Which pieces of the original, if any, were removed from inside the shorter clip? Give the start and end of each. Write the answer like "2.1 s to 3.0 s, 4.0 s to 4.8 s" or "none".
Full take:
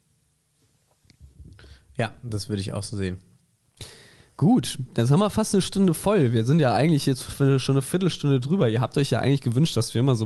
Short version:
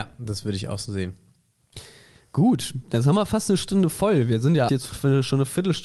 6.7 s to 7.0 s